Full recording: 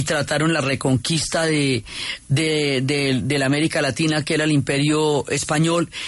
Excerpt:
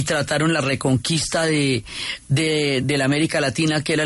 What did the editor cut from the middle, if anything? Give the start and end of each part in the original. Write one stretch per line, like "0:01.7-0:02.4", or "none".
0:02.8-0:03.2